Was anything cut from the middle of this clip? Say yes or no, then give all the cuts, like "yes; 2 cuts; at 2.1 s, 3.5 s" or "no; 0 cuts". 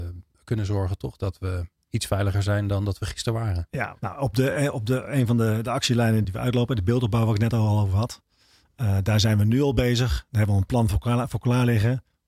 yes; 2 cuts; at 4.0 s, 6.2 s